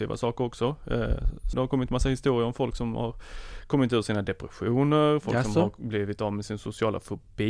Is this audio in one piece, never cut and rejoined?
no; 1 cut; at 1.5 s

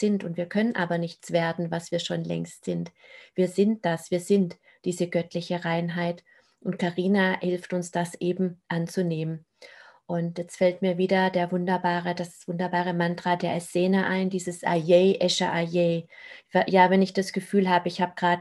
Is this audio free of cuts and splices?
yes; 0 cuts

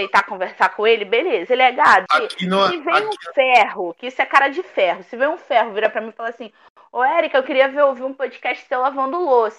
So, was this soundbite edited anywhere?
yes; 1 cut; at 2.1 s

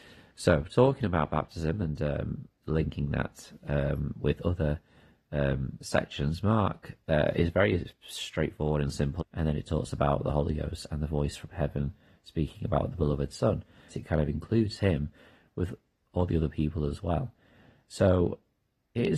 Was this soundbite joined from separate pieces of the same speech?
yes; 3 cuts; at 7.0 s, 9.2 s, 13.9 s

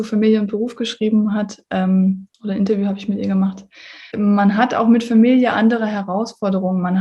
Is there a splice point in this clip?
yes; 2 cuts; at 2.3 s, 4.1 s

